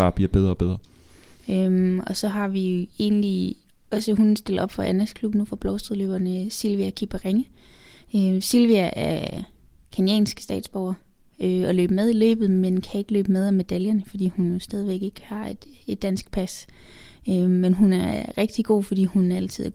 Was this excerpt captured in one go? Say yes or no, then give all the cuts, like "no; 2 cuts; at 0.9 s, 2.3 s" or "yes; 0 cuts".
yes; 0 cuts